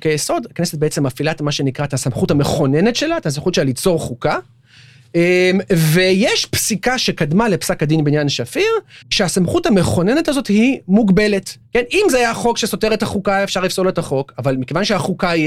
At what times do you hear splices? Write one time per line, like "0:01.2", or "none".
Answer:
0:09.0
0:11.6